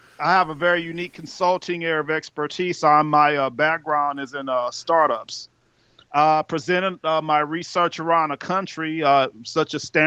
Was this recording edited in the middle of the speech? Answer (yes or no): no